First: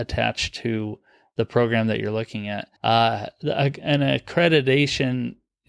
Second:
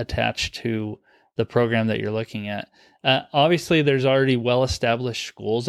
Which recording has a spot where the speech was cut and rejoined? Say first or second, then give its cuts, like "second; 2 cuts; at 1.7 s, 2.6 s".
first; 1 cut; at 2.8 s